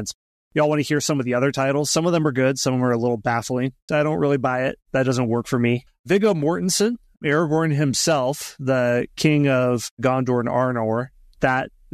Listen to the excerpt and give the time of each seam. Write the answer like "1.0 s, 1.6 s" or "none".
3.9 s, 5.9 s